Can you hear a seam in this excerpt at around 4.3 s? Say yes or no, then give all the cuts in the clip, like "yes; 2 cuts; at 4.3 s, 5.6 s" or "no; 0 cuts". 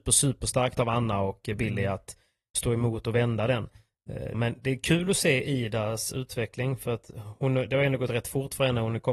yes; 1 cut; at 4.3 s